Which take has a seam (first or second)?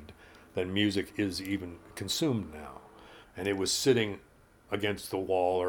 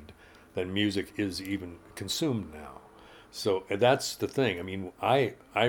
first